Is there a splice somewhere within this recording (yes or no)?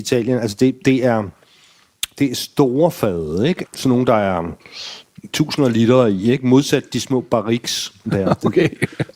yes